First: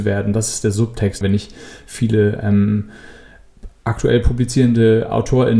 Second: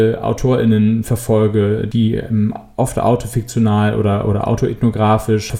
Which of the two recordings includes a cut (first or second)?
first